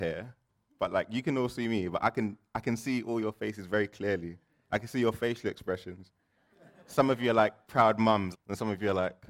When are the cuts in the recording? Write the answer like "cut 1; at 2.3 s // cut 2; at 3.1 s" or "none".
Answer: cut 1; at 8.3 s